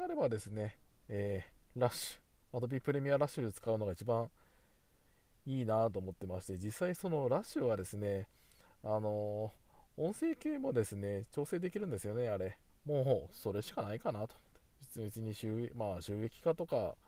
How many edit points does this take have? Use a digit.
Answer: 1